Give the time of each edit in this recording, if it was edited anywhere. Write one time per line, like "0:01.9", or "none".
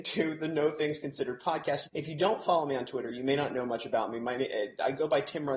0:01.9